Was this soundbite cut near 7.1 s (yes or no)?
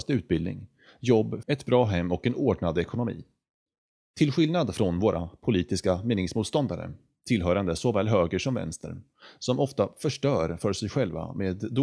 no